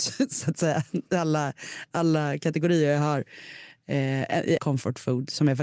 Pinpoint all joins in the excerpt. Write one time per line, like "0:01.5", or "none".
0:04.6